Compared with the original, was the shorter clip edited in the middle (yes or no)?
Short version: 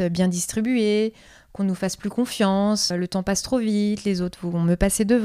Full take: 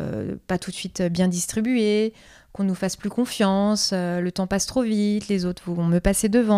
yes